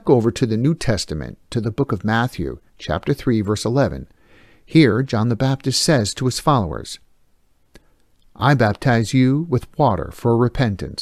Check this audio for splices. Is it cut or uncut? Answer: uncut